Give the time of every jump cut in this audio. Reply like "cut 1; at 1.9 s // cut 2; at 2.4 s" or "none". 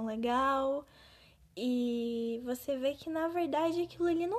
none